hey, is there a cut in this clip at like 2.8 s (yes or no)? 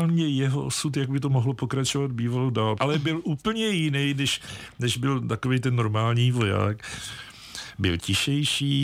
yes